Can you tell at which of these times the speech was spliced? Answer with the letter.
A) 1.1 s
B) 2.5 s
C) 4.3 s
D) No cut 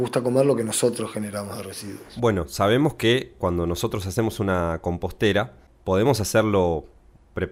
D